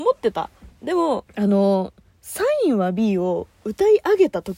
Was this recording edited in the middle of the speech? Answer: yes; 1 cut; at 1.3 s

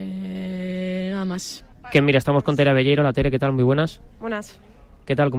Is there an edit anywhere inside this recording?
no; 0 cuts

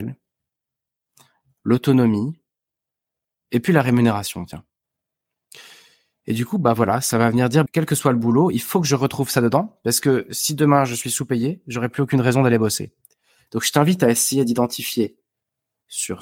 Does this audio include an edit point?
yes; 2 cuts; at 7.7 s, 13.5 s

